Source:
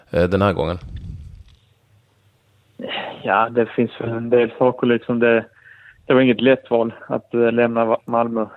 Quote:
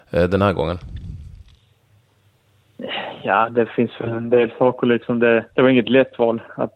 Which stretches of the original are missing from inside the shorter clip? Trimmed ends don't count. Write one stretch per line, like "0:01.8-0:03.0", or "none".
0:05.5-0:06.0